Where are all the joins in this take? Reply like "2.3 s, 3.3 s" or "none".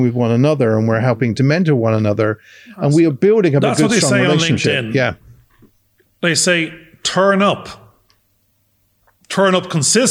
none